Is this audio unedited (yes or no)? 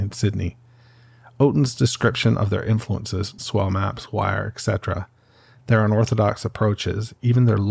no